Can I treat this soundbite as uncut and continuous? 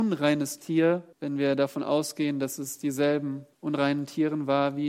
no; 2 cuts; at 1.1 s, 3.5 s

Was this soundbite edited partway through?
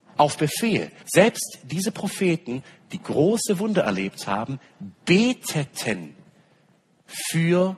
yes; 1 cut; at 1.0 s

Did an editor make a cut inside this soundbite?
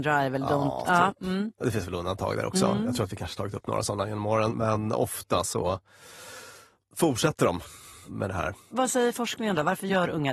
no; 0 cuts

